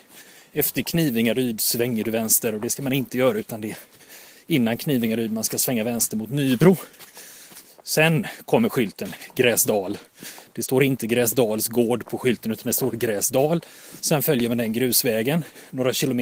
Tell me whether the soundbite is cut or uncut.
uncut